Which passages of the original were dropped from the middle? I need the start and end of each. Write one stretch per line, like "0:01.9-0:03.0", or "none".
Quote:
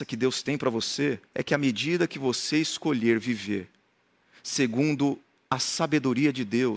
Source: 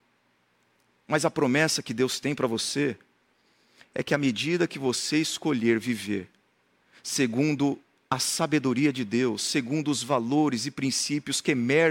0:03.0-0:03.9